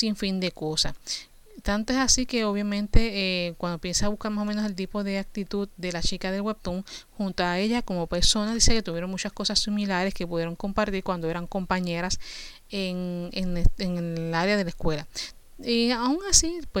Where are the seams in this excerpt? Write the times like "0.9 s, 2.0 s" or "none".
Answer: none